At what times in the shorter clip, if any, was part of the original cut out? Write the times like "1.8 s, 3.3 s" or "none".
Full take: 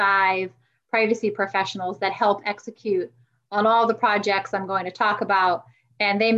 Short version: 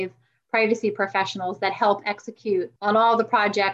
2.8 s